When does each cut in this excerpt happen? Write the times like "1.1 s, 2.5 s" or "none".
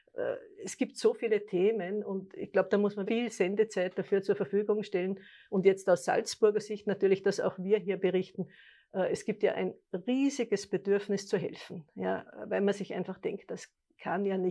3.1 s